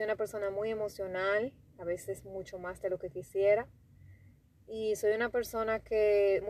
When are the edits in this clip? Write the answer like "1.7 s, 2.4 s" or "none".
none